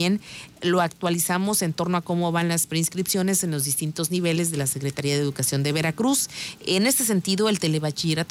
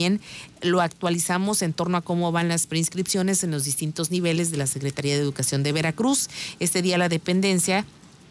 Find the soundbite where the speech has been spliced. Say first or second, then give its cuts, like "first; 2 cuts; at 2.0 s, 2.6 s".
first; 1 cut; at 6.6 s